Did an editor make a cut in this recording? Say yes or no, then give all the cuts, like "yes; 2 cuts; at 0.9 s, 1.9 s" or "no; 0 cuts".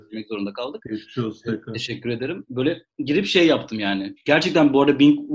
no; 0 cuts